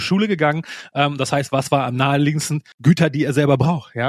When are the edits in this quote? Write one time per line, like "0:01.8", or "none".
0:02.7